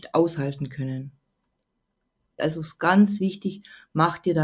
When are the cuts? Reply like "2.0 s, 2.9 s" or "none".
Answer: 2.4 s